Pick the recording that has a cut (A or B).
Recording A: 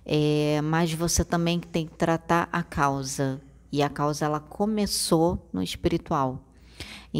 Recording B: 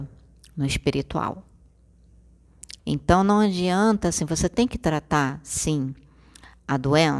B